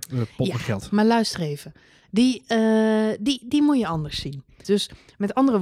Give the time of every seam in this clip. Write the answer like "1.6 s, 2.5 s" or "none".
4.6 s

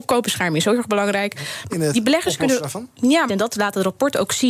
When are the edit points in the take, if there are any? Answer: 1.7 s, 3.3 s

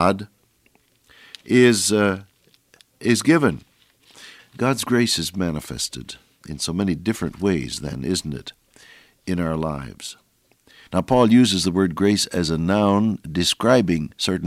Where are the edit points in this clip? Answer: 4.4 s, 10.9 s

